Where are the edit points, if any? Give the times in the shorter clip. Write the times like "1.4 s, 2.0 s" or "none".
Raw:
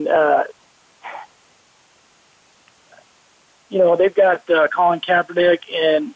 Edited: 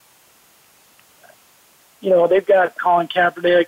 2.8 s